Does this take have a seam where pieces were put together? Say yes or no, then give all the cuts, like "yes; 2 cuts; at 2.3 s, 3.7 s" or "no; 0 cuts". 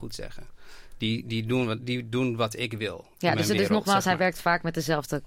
no; 0 cuts